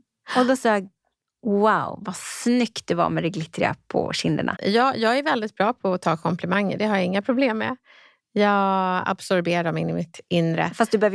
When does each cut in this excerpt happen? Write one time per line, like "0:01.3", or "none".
0:04.6